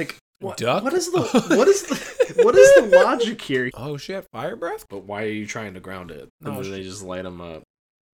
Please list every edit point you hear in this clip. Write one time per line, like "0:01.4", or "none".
0:03.7
0:04.9
0:06.3